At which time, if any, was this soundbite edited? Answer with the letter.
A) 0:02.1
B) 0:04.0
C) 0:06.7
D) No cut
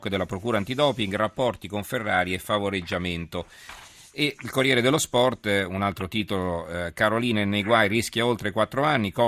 D